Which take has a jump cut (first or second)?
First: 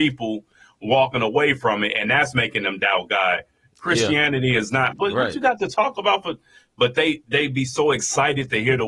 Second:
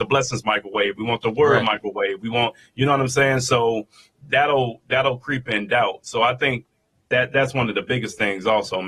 first